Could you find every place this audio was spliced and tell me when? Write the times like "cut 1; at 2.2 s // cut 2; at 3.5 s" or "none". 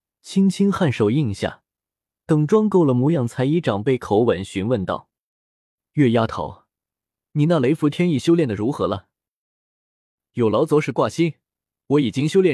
none